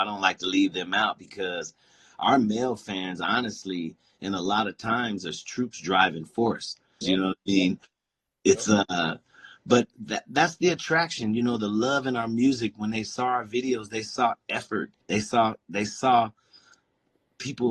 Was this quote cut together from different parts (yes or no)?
yes